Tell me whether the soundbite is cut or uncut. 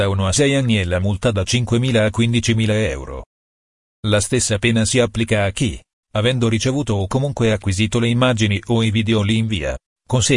uncut